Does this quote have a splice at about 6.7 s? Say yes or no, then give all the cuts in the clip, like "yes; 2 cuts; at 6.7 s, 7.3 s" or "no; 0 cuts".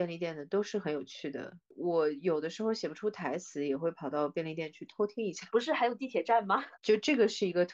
yes; 2 cuts; at 5.5 s, 6.7 s